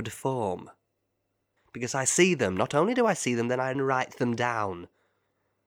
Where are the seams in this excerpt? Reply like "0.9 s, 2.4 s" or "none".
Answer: 1.6 s, 3.7 s